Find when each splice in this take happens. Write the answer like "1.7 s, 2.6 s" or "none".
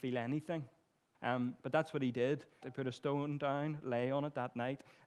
1.1 s, 2.6 s